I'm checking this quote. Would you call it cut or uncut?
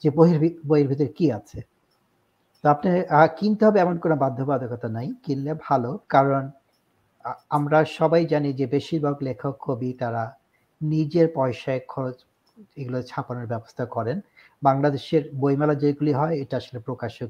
cut